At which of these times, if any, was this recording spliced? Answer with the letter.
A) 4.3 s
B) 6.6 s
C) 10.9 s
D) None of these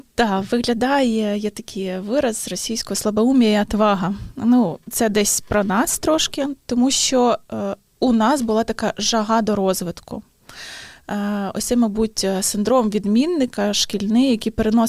D